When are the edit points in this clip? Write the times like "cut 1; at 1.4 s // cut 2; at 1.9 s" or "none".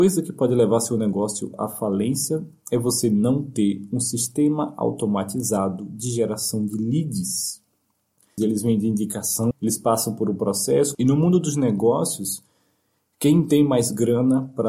cut 1; at 8.4 s // cut 2; at 9.5 s // cut 3; at 10.9 s